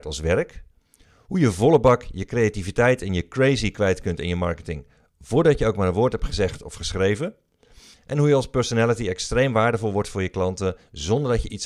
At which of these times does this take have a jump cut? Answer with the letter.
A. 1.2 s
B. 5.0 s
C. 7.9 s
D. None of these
C